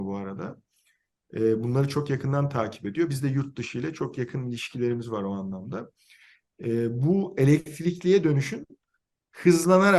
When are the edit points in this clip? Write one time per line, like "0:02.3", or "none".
none